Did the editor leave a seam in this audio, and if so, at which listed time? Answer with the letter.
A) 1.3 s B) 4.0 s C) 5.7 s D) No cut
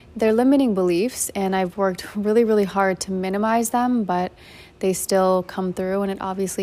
D